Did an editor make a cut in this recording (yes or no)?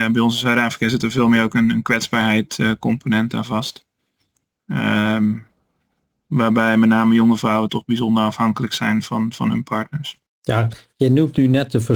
yes